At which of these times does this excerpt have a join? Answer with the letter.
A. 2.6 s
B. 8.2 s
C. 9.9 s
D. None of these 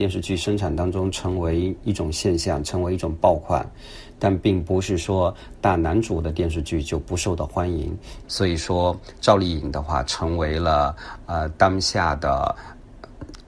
B